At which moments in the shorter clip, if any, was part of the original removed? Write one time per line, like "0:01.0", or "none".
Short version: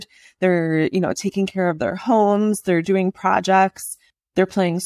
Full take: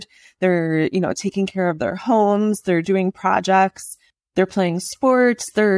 none